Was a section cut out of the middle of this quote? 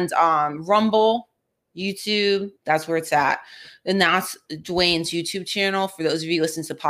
yes; 1 cut; at 2.6 s

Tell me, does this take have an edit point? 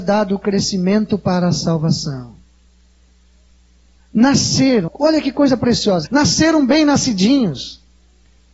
yes; 2 cuts; at 4.9 s, 6.0 s

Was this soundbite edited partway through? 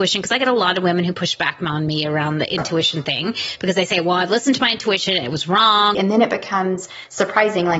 yes; 1 cut; at 5.9 s

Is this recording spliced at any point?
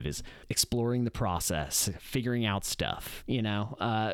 yes; 1 cut; at 3.2 s

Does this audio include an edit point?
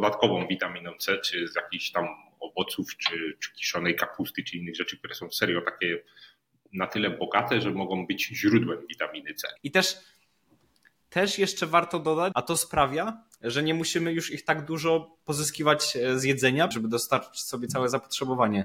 yes; 3 cuts; at 9.6 s, 12.3 s, 16.7 s

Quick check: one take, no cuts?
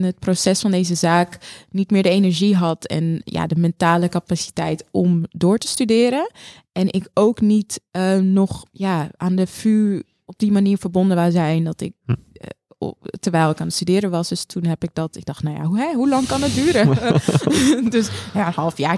yes; 0 cuts

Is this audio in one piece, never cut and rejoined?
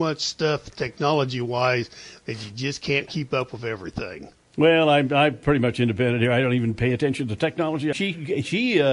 no; 2 cuts; at 3.1 s, 7.9 s

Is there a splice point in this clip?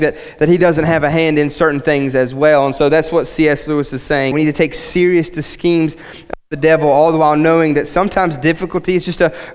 yes; 1 cut; at 4.3 s

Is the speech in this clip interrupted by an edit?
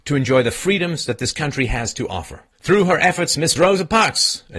yes; 2 cuts; at 2.5 s, 3.6 s

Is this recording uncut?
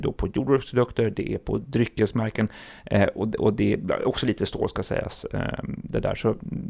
yes; 0 cuts

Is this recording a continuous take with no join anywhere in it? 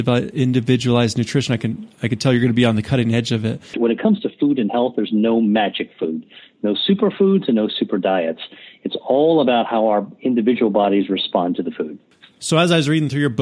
no; 1 cut; at 3.7 s

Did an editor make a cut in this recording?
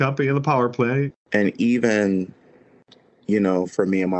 yes; 1 cut; at 1.1 s

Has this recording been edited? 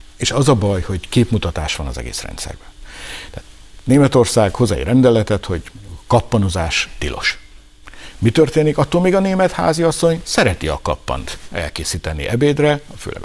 no; 0 cuts

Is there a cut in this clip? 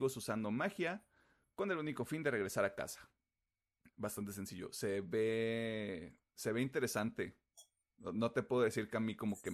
no; 0 cuts

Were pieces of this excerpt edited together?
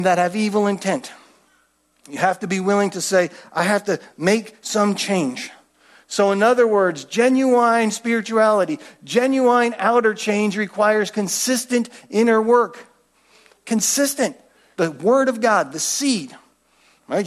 yes; 1 cut; at 14.8 s

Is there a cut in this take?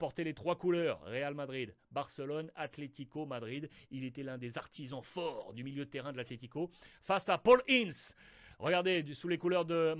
no; 0 cuts

